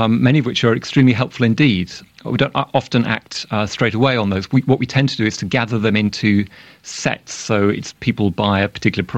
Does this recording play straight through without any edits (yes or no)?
yes